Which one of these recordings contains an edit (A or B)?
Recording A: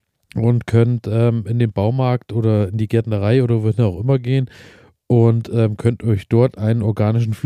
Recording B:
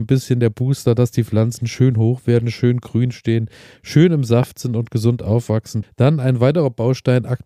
B